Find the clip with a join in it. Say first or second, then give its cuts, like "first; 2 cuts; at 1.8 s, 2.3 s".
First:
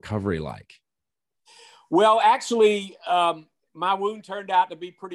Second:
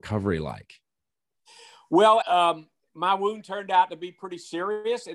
second; 1 cut; at 2.2 s